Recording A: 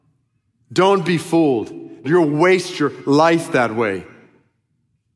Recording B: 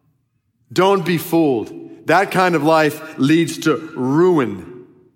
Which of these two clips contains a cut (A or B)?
A